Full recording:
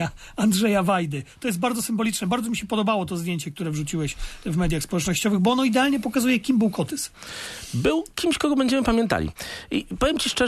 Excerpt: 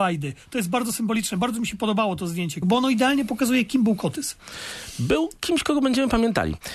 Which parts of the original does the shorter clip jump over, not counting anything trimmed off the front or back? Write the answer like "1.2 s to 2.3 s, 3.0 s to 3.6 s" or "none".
3.5 s to 5.4 s